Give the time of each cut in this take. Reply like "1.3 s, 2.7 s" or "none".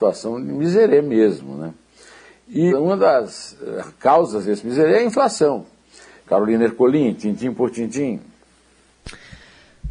2.7 s, 6.2 s